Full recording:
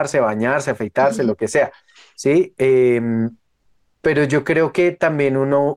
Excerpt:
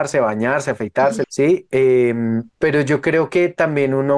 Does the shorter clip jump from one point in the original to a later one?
yes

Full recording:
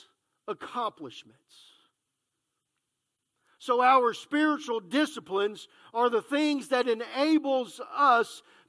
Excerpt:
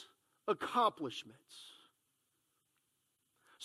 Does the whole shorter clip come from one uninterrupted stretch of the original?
yes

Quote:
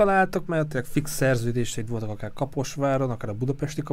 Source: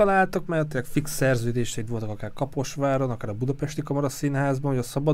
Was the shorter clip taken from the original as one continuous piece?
yes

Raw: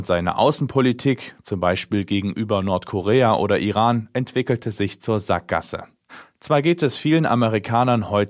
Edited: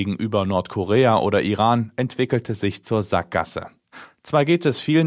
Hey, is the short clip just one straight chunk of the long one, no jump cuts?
yes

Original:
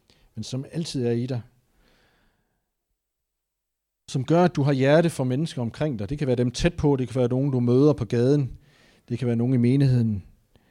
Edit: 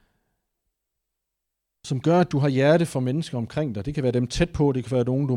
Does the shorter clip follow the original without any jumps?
yes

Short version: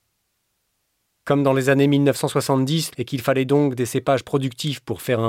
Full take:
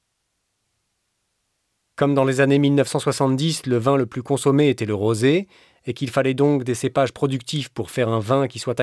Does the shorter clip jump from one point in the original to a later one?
yes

